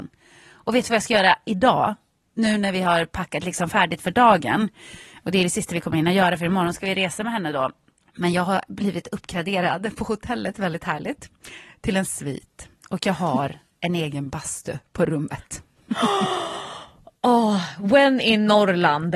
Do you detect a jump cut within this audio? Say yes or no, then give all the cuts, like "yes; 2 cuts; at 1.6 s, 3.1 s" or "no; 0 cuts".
no; 0 cuts